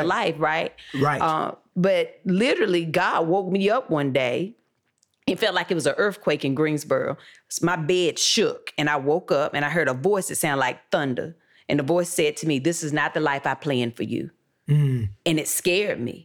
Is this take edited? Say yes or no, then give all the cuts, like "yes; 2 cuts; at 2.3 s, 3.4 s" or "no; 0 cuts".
no; 0 cuts